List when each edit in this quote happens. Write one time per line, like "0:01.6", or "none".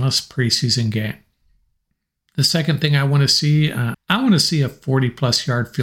0:03.9